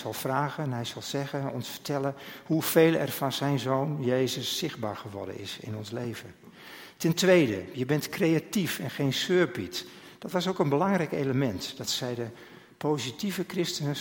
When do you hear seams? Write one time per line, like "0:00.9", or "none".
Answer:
none